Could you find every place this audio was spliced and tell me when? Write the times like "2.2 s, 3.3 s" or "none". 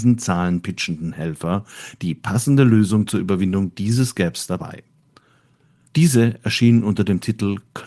5.9 s